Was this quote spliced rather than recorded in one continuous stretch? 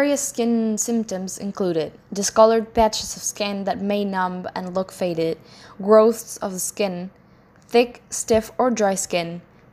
no; 0 cuts

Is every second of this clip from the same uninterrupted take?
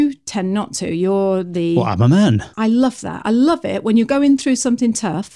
no; 1 cut; at 2.5 s

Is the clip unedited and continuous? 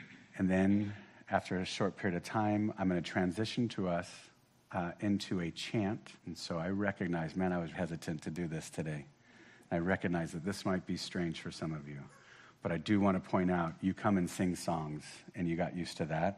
no; 2 cuts; at 6.2 s, 7.7 s

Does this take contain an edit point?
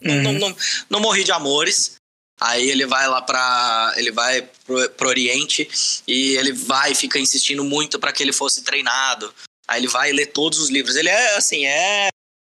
yes; 1 cut; at 2.4 s

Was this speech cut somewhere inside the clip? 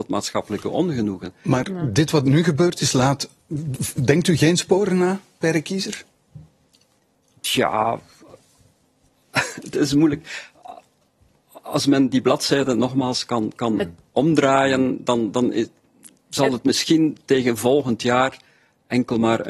no; 0 cuts

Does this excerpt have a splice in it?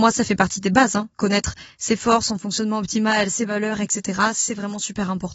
no; 0 cuts

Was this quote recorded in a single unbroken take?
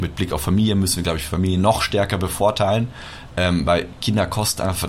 yes; 0 cuts

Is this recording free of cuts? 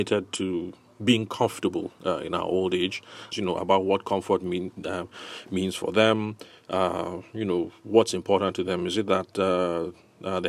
no; 1 cut; at 3.3 s

